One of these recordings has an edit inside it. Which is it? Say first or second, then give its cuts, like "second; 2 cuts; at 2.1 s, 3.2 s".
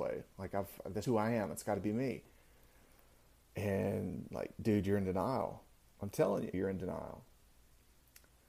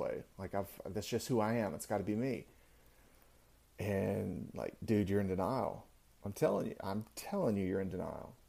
first; 2 cuts; at 1.0 s, 6.5 s